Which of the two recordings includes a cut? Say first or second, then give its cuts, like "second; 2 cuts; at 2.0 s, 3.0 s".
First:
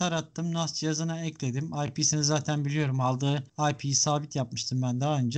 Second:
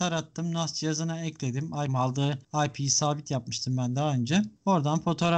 second; 1 cut; at 1.9 s